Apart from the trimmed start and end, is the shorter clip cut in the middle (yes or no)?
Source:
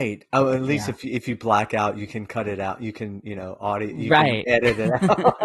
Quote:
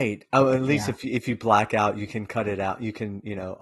no